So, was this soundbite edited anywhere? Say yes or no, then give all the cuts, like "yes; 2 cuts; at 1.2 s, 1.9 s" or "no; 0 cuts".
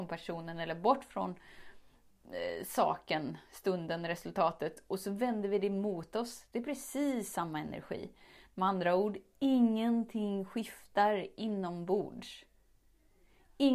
no; 0 cuts